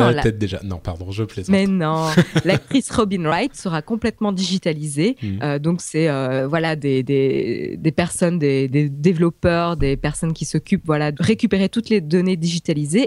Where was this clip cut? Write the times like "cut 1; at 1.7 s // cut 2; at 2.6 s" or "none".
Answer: cut 1; at 8.7 s // cut 2; at 11.1 s